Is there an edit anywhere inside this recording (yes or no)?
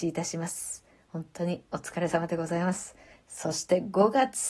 yes